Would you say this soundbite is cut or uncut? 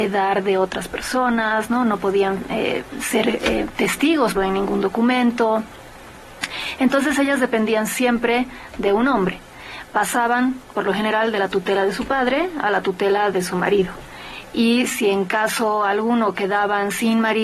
cut